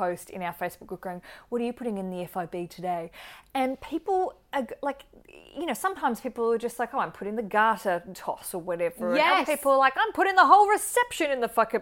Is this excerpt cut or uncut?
uncut